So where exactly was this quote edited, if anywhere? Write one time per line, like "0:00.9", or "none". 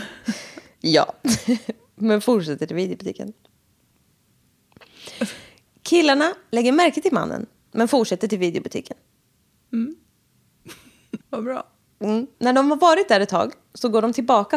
0:11.2
0:12.3